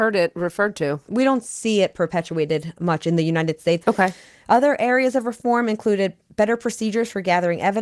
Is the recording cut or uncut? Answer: cut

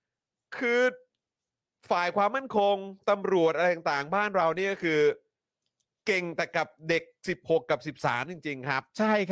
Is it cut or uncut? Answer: uncut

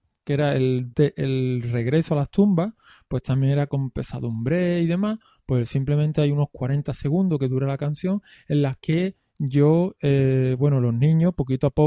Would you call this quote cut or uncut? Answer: uncut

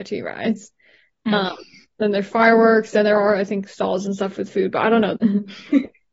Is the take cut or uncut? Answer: cut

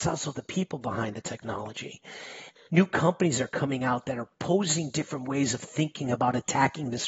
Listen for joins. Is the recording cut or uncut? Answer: cut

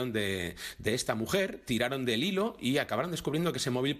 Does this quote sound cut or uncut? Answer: uncut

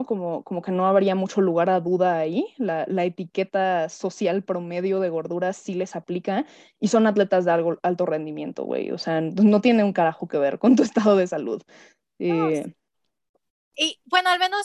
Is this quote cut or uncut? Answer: uncut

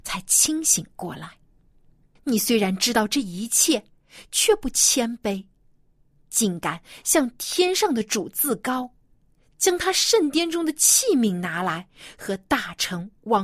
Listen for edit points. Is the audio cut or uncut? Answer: cut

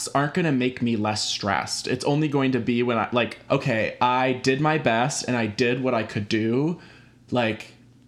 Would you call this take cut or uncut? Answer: cut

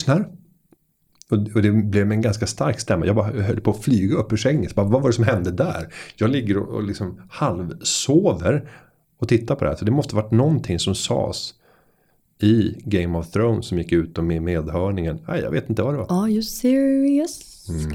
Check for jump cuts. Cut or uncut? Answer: uncut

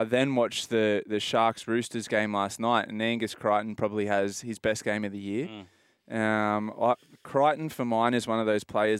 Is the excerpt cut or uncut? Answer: uncut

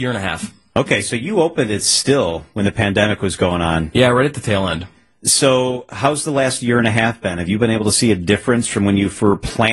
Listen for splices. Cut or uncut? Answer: uncut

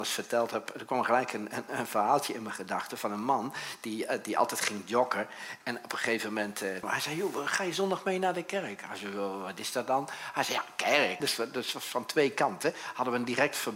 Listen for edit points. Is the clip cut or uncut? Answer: cut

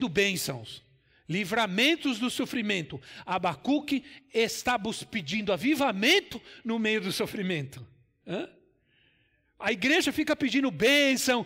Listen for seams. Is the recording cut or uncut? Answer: uncut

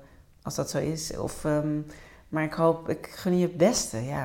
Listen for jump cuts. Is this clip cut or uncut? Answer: uncut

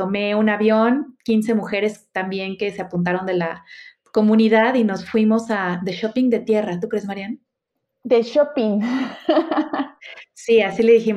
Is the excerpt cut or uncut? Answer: uncut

